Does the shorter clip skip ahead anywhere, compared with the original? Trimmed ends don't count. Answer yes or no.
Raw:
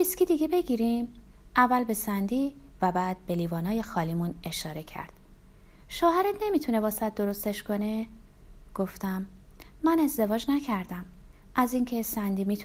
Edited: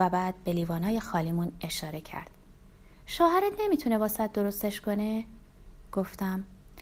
no